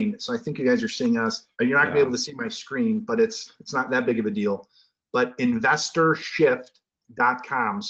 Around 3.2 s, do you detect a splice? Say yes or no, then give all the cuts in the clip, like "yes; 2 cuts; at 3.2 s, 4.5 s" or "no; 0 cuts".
no; 1 cut; at 1.5 s